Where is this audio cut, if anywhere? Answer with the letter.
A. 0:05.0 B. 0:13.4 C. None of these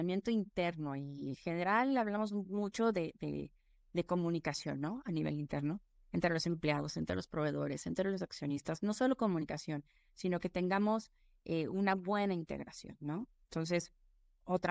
B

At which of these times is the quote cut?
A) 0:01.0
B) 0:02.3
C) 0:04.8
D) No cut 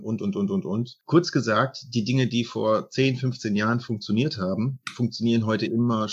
D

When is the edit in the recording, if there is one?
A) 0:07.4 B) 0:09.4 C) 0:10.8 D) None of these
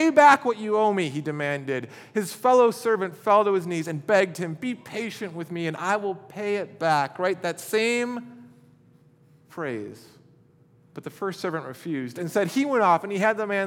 D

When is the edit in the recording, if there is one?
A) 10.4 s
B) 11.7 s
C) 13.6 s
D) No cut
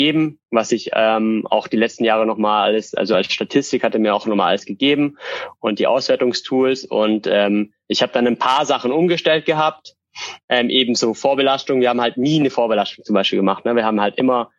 D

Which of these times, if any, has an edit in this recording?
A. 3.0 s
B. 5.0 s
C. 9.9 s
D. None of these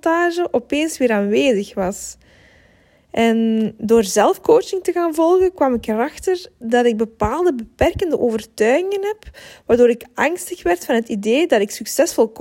D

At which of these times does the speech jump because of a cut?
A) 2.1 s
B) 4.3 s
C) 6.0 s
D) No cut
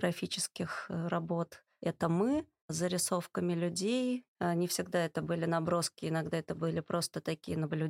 B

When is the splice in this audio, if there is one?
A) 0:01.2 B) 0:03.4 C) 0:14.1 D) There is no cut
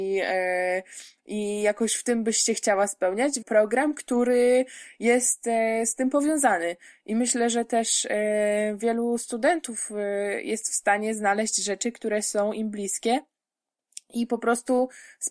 B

